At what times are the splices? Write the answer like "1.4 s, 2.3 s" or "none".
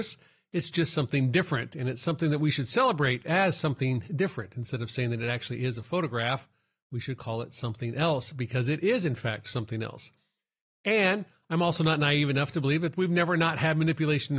none